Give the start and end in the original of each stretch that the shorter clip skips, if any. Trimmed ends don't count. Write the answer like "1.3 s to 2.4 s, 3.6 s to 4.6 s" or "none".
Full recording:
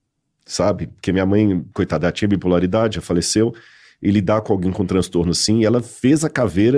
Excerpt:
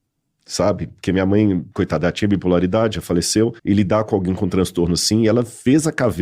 3.6 s to 4.0 s